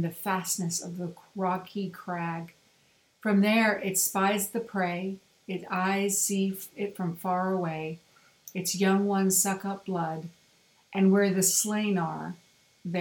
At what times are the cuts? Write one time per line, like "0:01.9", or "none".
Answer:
none